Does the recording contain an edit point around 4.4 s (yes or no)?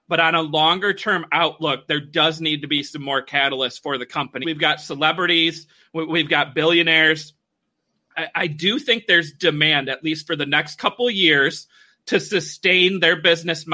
yes